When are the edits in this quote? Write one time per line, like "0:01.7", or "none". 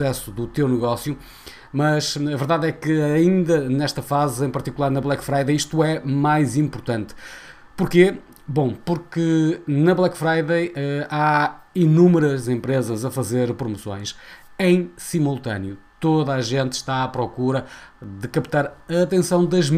none

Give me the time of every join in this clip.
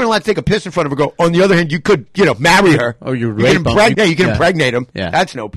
0:03.9

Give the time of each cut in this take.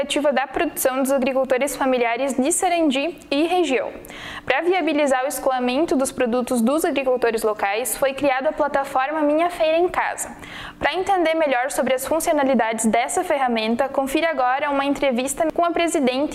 none

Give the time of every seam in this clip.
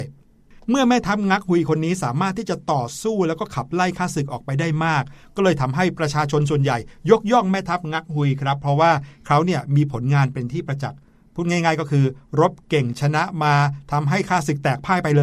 none

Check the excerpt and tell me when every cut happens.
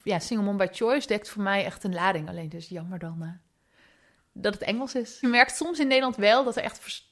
none

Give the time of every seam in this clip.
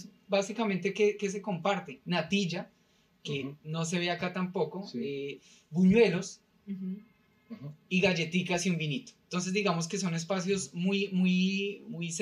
none

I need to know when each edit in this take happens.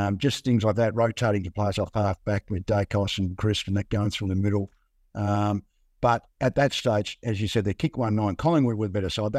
none

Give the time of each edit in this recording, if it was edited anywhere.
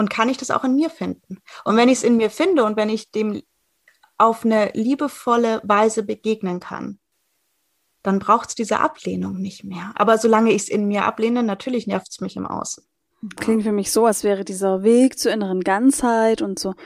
0:13.4

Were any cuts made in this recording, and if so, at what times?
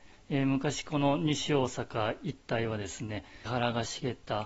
0:03.5

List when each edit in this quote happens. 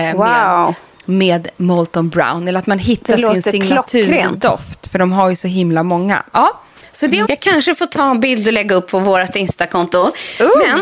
0:07.2

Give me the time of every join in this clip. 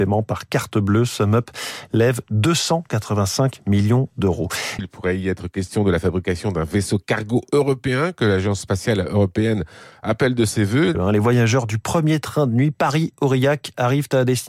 0:04.8
0:10.9

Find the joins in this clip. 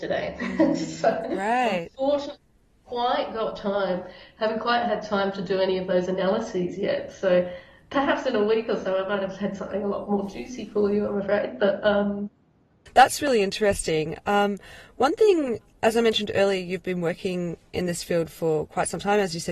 none

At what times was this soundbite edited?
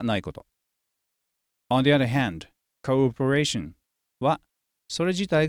0:02.7

